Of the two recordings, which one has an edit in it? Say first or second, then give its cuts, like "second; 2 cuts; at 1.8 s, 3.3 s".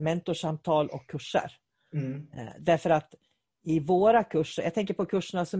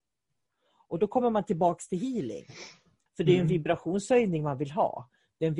second; 1 cut; at 3.1 s